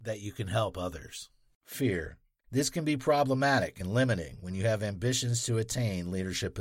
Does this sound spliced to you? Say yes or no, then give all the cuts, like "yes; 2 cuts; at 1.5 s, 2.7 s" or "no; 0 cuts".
yes; 1 cut; at 2.4 s